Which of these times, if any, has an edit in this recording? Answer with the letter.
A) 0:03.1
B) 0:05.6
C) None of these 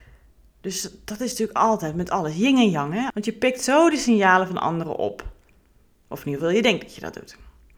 A